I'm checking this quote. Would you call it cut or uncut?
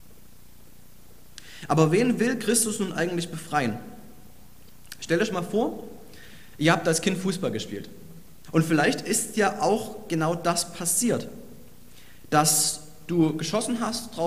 cut